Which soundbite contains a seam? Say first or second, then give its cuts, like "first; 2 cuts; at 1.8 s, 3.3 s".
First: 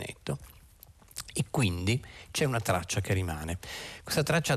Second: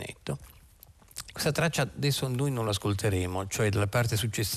second; 1 cut; at 1.3 s